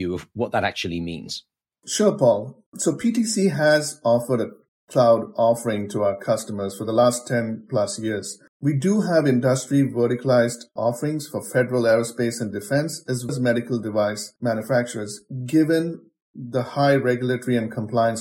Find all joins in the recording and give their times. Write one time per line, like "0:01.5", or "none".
0:08.5
0:13.3
0:14.4